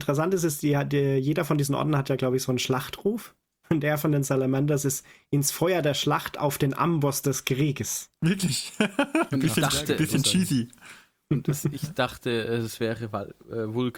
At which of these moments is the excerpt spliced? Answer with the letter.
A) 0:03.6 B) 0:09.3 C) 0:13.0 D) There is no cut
B